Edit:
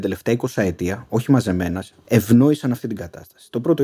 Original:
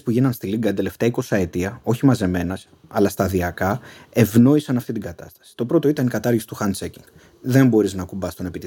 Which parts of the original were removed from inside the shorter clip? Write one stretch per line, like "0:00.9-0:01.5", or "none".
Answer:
0:02.8-0:04.1